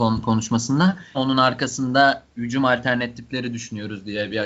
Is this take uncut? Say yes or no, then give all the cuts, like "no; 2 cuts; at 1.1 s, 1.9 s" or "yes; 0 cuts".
no; 1 cut; at 1.1 s